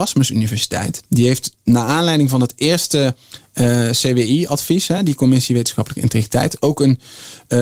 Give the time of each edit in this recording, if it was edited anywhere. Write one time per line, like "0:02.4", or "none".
none